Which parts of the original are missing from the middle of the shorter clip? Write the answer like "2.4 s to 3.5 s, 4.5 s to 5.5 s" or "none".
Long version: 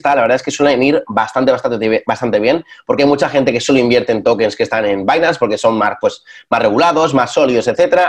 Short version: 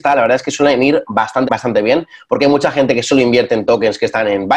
1.5 s to 2.0 s